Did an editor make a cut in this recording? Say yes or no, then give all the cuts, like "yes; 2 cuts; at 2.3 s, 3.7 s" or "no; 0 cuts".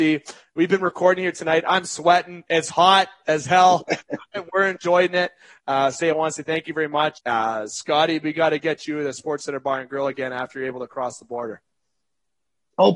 yes; 2 cuts; at 6.0 s, 7.2 s